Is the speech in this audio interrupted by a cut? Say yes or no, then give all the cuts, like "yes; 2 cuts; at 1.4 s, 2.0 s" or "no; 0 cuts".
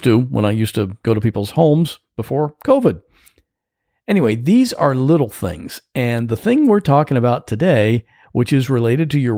no; 0 cuts